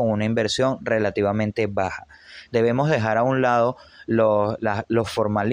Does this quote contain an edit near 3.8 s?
no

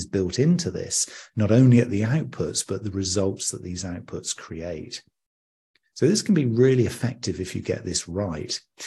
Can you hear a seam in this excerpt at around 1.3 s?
yes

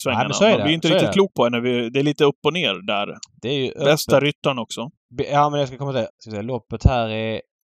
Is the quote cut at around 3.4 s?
yes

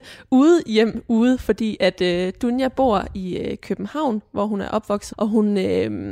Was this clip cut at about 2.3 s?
no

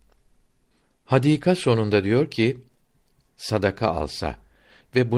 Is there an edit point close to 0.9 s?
no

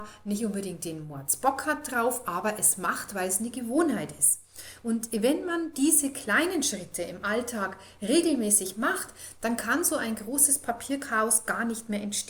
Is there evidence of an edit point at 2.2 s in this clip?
no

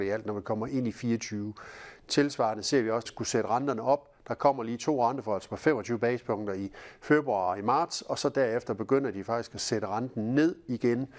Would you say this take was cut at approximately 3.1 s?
yes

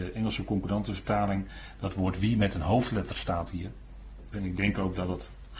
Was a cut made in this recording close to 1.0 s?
no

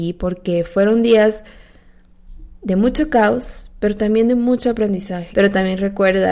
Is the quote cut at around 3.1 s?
no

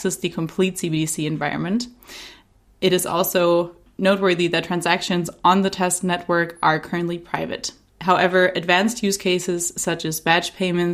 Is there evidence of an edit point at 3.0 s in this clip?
no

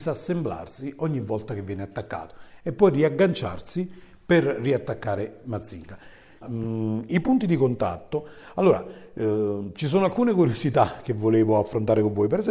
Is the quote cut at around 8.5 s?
no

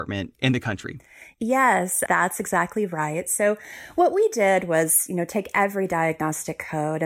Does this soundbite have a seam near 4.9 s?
no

